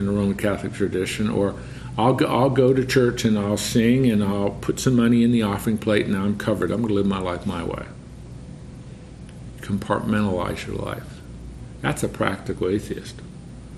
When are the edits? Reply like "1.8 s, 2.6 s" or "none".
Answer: 6.7 s